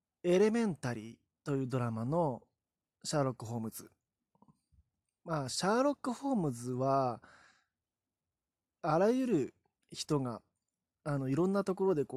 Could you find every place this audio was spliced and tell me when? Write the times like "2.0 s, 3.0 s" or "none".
none